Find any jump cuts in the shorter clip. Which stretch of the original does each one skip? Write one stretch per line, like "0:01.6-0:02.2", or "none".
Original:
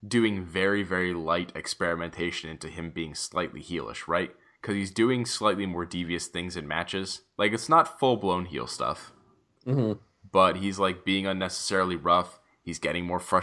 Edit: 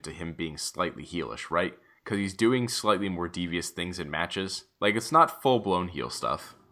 none